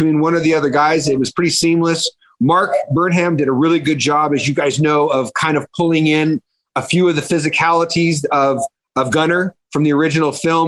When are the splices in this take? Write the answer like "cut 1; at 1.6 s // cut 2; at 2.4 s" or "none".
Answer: none